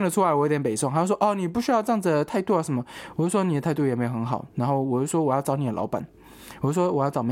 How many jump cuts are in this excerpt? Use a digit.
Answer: 0